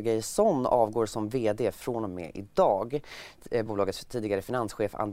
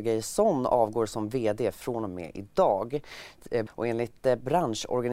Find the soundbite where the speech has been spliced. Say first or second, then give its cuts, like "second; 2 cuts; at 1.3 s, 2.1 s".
second; 1 cut; at 3.7 s